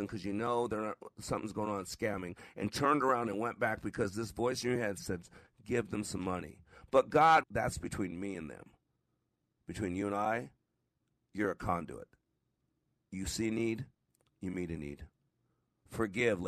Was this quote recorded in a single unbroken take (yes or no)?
no